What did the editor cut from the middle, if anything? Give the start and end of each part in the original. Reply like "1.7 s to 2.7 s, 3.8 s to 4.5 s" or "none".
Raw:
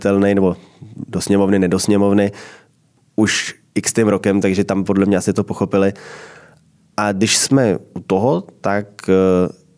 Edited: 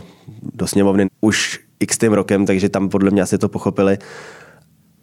1.6 s to 3.0 s